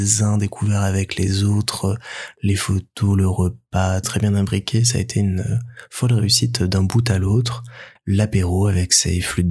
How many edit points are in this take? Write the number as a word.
two